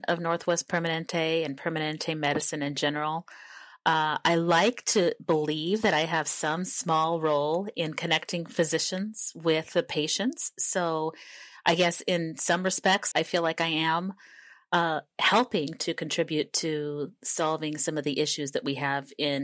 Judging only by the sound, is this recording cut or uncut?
cut